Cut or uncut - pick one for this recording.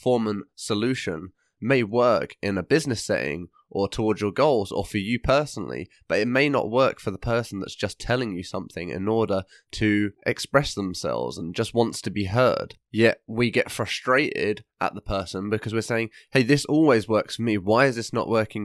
uncut